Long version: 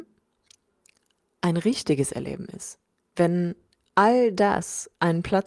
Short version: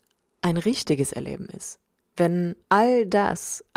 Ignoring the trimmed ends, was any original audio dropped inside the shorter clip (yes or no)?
yes